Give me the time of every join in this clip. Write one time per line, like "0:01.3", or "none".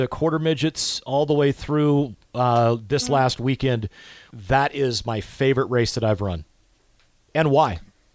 0:04.3